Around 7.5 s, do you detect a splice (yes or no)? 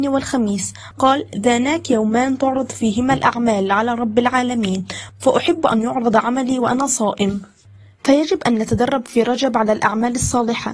no